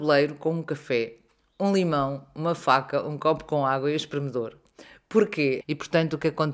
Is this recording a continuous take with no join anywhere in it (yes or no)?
no